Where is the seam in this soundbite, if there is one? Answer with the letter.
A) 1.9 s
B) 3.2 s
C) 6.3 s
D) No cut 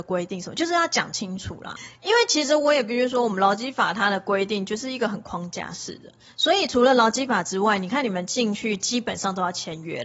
D